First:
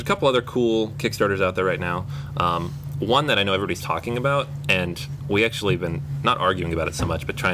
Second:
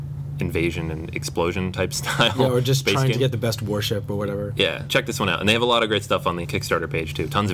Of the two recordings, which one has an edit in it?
second; 2 cuts; at 4.8 s, 6.4 s

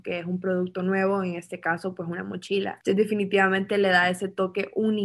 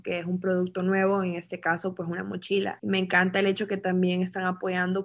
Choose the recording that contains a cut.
second; 1 cut; at 2.8 s

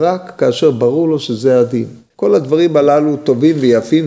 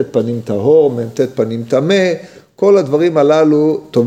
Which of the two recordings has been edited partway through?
first; 1 cut; at 2.1 s

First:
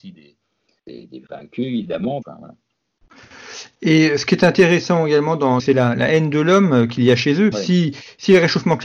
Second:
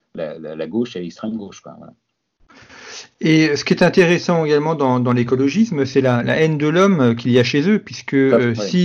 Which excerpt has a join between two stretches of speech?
first; 3 cuts; at 2.2 s, 5.6 s, 7.5 s

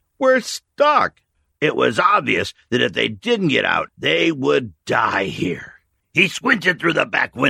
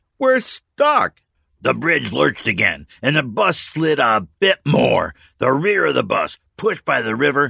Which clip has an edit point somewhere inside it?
first; 3 cuts; at 1.5 s, 3.9 s, 6.0 s

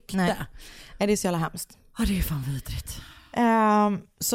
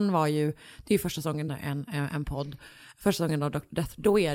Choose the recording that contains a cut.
second; 1 cut; at 1.5 s

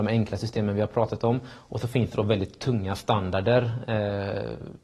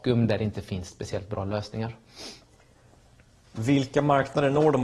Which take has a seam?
second; 1 cut; at 3.4 s

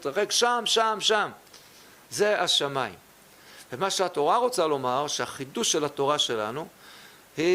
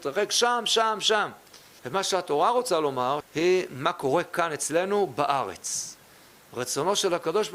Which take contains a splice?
second; 2 cuts; at 1.8 s, 3.2 s

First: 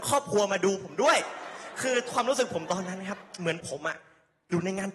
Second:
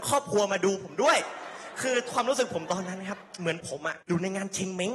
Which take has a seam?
second; 1 cut; at 4.0 s

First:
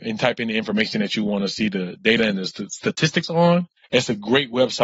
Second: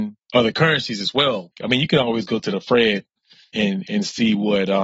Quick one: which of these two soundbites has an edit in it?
second; 1 cut; at 1.6 s

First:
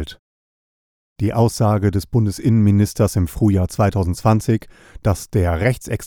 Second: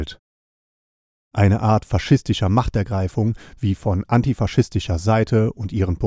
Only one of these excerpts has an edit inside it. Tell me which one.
first; 1 cut; at 1.0 s

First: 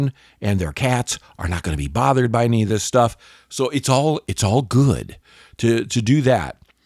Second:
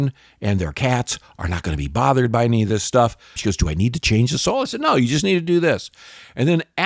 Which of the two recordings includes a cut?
second; 1 cut; at 3.4 s

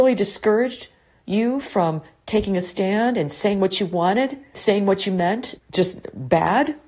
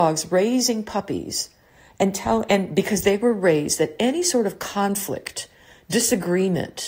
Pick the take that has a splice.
first; 2 cuts; at 4.5 s, 5.6 s

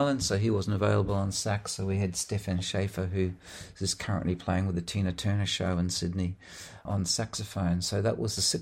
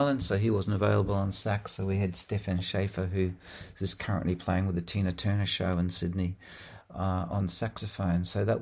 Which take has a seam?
first; 1 cut; at 6.9 s

